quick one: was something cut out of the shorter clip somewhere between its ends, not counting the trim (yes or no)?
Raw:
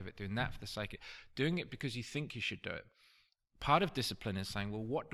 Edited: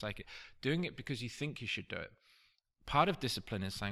no